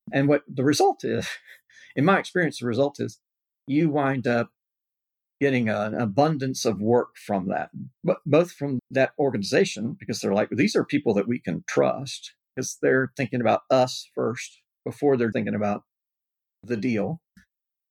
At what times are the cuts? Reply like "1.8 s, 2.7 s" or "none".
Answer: 8.8 s, 12.5 s, 15.3 s